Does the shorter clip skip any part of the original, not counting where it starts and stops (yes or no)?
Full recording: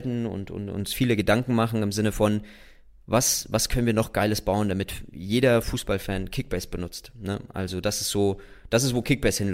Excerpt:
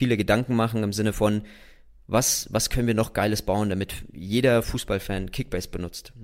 no